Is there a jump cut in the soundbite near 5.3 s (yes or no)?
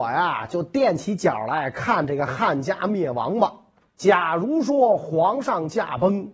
no